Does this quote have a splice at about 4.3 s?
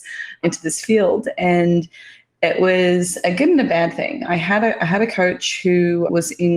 no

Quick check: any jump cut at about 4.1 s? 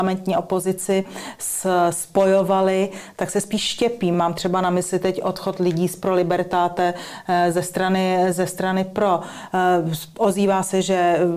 no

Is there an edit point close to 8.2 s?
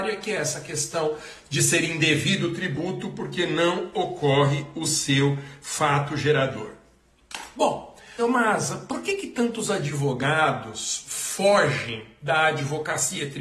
yes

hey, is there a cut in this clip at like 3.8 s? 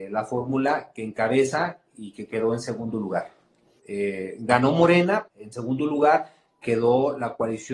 yes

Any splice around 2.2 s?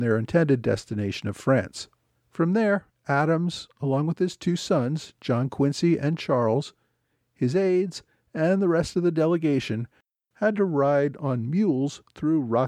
yes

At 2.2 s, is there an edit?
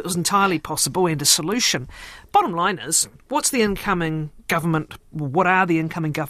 no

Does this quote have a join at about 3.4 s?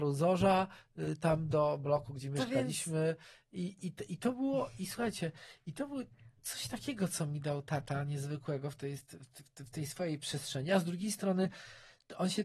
no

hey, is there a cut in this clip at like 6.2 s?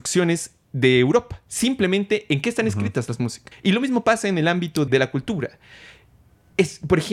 no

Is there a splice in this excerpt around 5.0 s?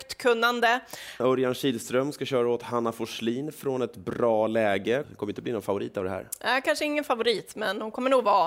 yes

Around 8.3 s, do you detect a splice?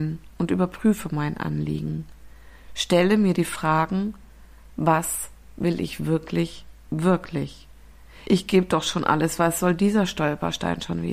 yes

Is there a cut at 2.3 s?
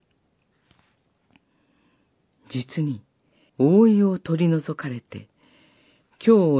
no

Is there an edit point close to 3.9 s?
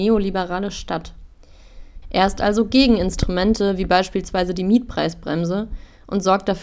no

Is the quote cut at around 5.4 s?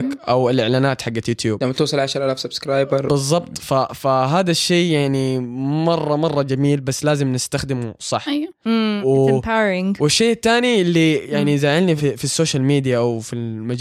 no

